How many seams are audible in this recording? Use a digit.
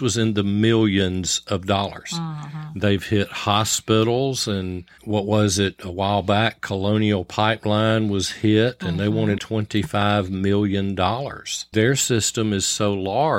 2